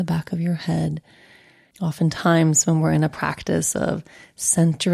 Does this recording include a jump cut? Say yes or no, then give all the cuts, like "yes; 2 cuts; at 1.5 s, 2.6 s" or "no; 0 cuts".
yes; 1 cut; at 1.7 s